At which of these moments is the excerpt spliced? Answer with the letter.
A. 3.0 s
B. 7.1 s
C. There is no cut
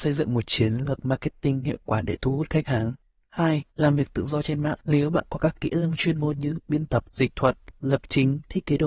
C